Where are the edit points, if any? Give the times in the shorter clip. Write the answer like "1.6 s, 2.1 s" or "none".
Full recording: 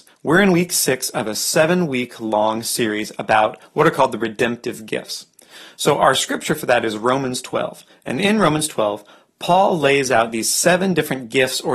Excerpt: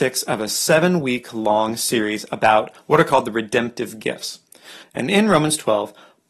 4.8 s

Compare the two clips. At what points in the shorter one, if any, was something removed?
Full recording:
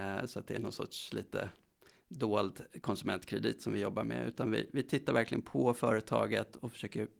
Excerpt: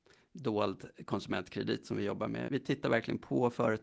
2.5 s

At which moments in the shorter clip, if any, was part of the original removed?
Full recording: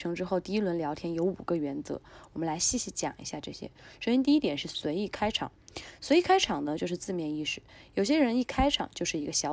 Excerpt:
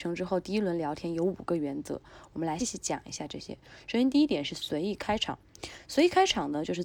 2.6 s

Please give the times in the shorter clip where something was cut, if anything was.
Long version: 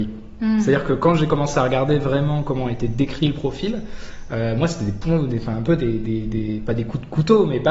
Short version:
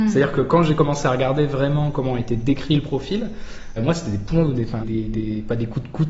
3.8 s, 4.8 s

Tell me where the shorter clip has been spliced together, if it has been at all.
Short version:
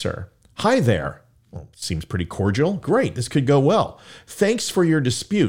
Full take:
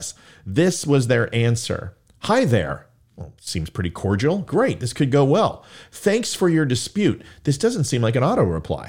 none

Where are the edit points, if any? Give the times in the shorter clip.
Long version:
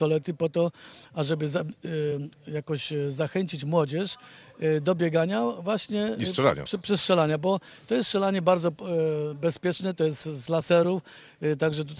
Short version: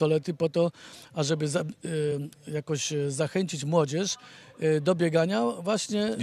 none

